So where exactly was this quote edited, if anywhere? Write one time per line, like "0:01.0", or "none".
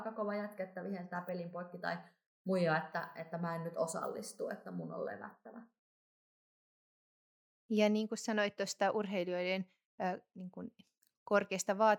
none